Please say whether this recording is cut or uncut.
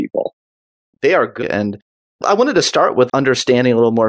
cut